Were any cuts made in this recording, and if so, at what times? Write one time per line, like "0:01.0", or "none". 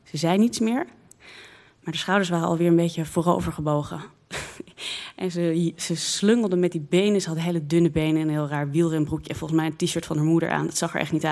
none